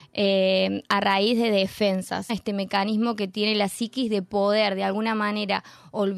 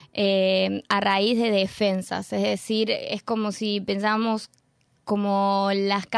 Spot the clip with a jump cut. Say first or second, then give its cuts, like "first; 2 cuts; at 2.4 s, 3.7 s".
first; 1 cut; at 2.3 s